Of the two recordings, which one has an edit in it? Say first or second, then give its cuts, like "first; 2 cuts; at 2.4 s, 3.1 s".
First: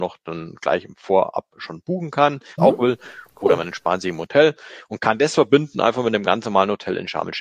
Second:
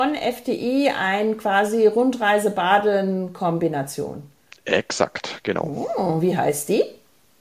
first; 1 cut; at 2.6 s